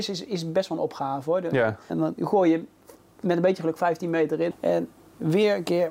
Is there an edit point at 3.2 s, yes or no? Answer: no